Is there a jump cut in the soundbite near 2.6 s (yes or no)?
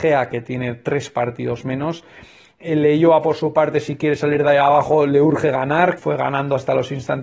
yes